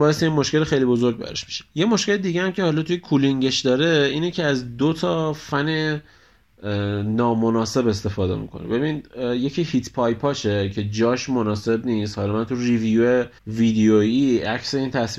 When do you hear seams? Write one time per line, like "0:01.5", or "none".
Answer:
0:01.7
0:13.4